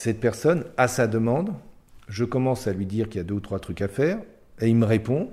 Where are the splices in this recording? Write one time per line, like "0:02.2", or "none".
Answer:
none